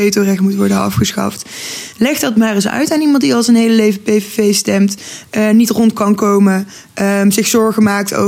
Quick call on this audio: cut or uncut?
uncut